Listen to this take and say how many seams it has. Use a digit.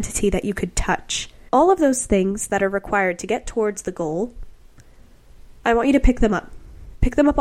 1